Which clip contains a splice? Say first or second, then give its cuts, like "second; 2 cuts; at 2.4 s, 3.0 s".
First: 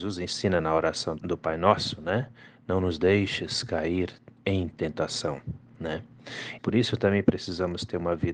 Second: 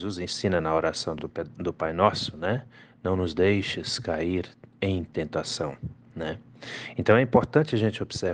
first; 2 cuts; at 1.2 s, 6.6 s